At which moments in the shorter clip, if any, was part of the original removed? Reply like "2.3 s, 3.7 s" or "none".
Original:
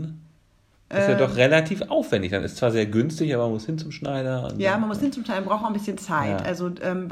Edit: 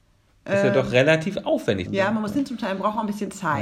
1.9 s